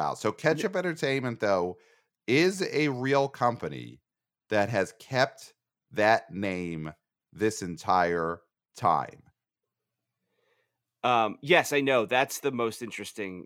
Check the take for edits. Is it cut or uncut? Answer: uncut